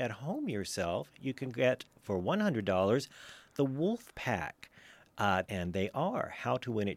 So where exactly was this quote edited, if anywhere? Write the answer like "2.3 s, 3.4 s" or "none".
5.4 s